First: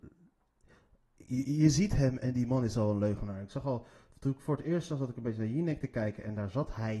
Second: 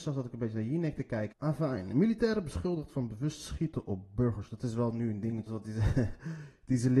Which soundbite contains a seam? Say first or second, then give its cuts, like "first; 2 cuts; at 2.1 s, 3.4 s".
second; 2 cuts; at 1.3 s, 5.5 s